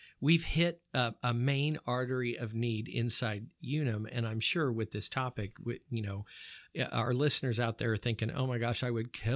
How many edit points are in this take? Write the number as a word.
zero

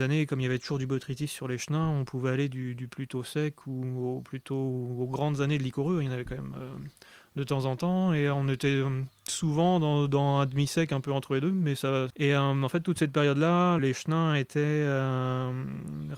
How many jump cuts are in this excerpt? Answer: two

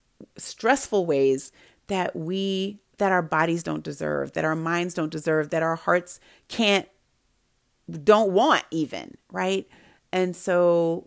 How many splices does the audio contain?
zero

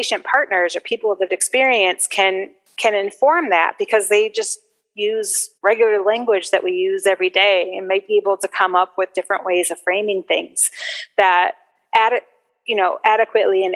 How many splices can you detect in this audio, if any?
one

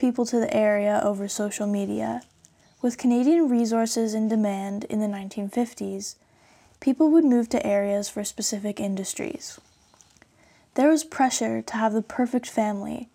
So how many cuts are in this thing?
one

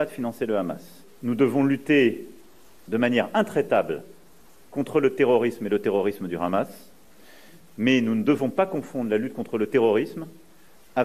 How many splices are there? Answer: zero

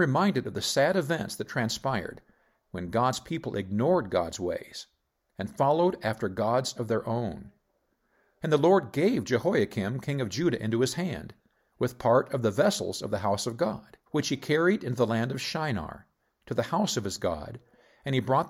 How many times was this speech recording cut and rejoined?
two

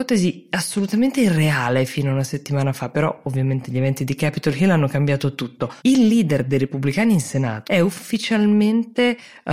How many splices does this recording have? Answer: two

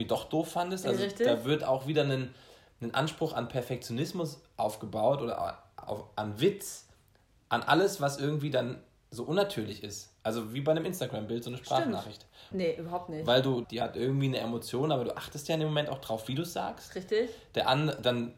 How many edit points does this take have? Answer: two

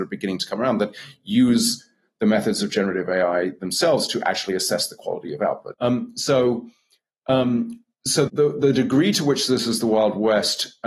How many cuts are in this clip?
two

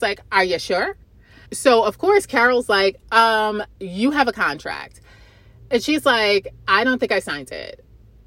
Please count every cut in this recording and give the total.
one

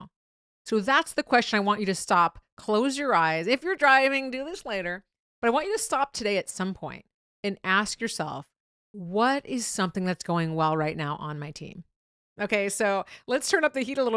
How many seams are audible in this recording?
one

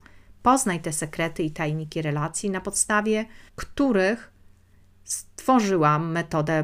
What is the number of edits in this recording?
one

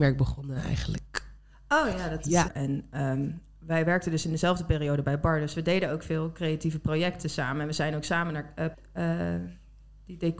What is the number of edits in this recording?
two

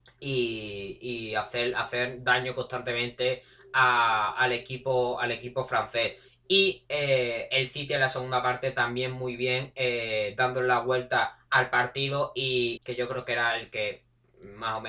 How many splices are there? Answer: two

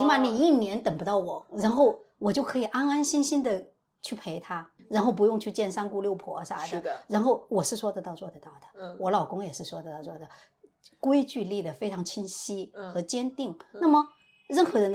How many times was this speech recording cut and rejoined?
zero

